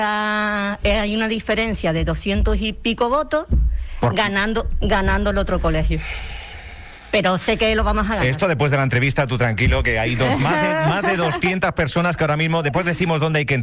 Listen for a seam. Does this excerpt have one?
no; 0 cuts

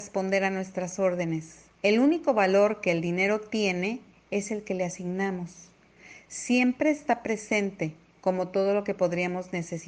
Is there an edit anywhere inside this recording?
yes; 1 cut; at 1.7 s

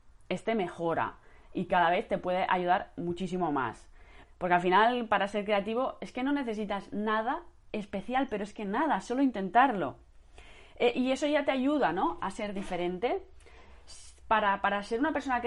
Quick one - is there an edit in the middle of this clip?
yes; 1 cut; at 4.2 s

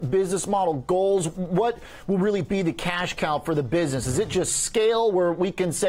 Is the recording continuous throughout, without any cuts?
yes; 0 cuts

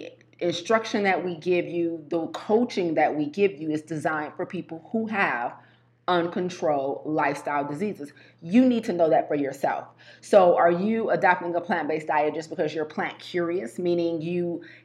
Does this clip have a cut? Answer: no; 0 cuts

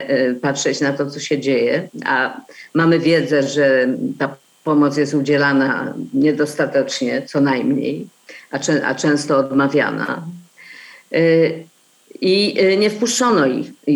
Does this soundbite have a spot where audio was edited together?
no; 0 cuts

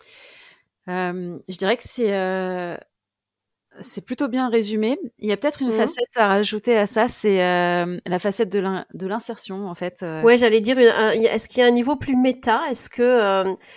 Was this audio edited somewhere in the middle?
no; 0 cuts

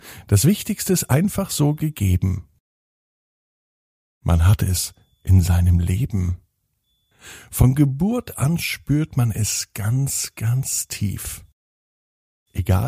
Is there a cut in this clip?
no; 0 cuts

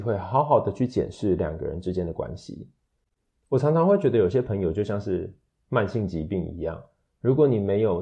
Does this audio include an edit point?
no; 0 cuts

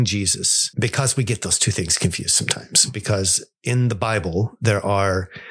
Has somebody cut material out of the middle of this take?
no; 0 cuts

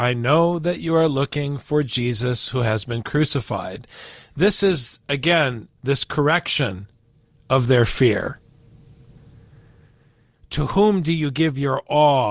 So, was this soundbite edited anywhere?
yes; 2 cuts; at 5.7 s, 10.4 s

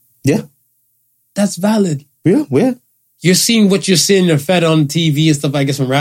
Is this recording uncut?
yes; 0 cuts

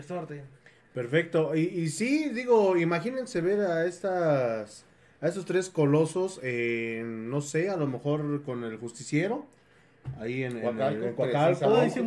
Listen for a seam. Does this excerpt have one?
no; 0 cuts

